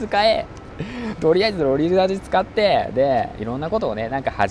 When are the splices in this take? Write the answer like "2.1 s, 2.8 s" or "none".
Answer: none